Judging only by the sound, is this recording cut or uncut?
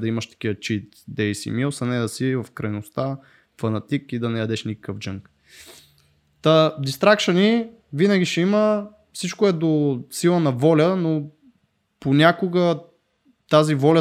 uncut